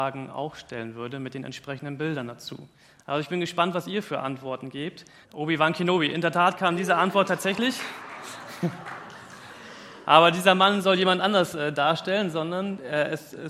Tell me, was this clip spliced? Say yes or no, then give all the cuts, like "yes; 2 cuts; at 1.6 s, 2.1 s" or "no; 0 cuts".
yes; 1 cut; at 5.2 s